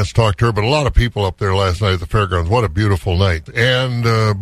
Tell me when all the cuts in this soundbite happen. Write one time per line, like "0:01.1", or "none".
0:03.5